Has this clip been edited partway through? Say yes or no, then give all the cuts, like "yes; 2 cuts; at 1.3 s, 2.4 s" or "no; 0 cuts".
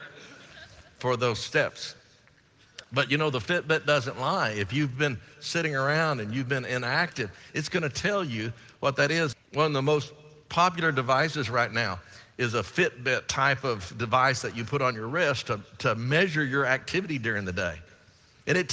yes; 1 cut; at 9.3 s